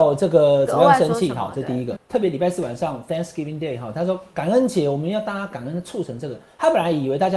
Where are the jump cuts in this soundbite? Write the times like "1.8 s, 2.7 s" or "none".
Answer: 2.0 s